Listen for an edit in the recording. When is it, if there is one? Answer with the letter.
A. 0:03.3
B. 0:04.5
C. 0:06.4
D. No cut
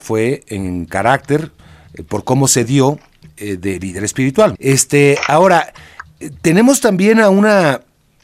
B